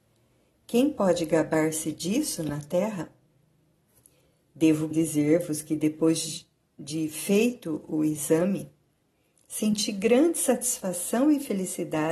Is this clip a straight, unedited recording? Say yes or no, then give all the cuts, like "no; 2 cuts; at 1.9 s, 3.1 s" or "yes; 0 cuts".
no; 1 cut; at 4.9 s